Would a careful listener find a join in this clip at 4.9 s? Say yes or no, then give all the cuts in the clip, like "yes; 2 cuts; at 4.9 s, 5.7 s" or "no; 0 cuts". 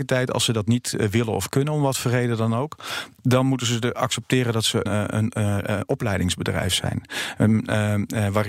yes; 1 cut; at 4.9 s